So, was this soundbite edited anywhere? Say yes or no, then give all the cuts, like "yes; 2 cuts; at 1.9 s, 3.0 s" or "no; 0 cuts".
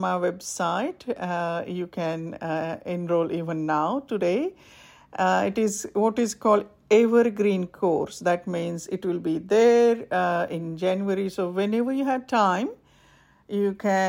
no; 0 cuts